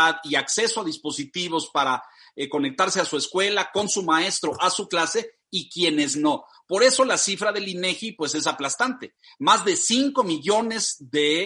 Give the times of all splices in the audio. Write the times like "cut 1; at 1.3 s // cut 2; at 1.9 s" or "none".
none

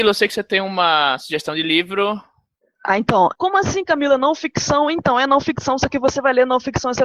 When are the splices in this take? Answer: cut 1; at 3.4 s

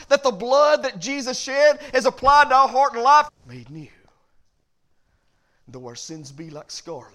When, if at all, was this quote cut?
cut 1; at 3.3 s

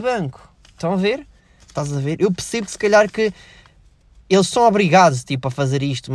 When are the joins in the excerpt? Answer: cut 1; at 1.6 s

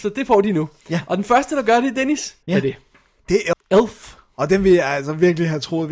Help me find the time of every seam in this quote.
cut 1; at 2.4 s // cut 2; at 3.5 s

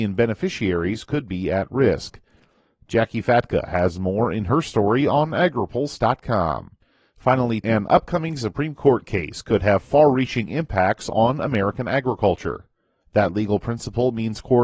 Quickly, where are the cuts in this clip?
cut 1; at 7.6 s // cut 2; at 13.0 s

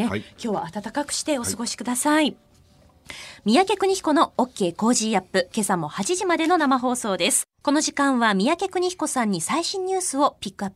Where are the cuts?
cut 1; at 7.5 s

